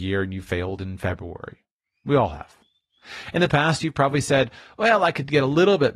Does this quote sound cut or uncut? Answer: uncut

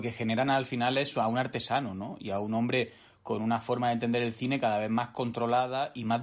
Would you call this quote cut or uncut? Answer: uncut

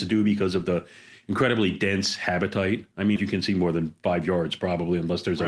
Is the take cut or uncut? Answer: cut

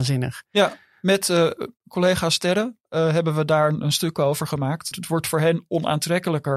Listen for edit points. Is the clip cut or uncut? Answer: cut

